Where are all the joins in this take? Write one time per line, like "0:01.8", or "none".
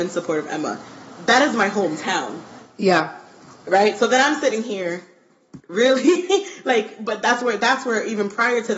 0:05.6